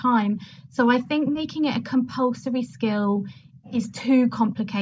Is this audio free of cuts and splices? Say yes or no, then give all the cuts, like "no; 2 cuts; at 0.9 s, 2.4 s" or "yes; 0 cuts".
yes; 0 cuts